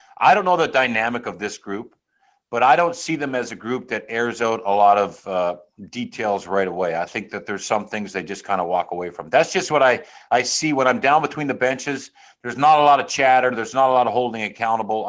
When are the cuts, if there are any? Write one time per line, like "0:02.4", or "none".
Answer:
none